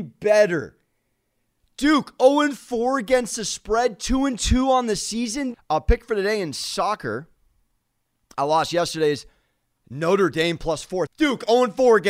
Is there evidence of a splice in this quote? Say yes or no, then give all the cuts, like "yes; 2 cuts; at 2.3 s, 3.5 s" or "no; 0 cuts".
yes; 2 cuts; at 5.5 s, 11.1 s